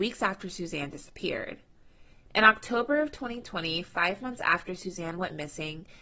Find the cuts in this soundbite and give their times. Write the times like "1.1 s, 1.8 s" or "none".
2.3 s